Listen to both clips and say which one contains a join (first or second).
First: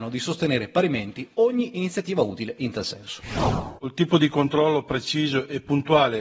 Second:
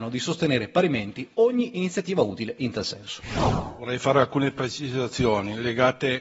first